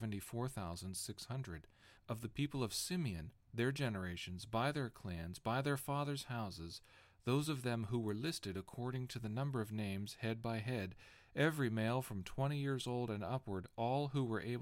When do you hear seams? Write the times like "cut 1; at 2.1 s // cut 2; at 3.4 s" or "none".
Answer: cut 1; at 2.0 s